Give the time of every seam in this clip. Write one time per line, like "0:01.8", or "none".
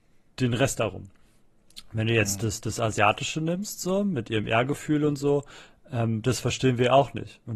none